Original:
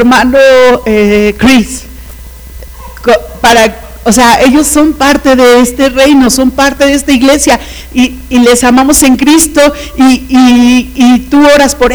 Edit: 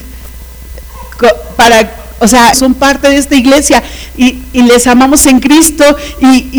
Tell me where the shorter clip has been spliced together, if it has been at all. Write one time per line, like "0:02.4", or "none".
0:02.5